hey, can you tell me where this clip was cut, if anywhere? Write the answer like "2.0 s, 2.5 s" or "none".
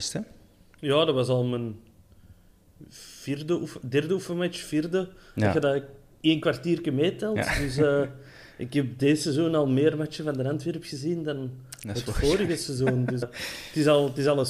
13.2 s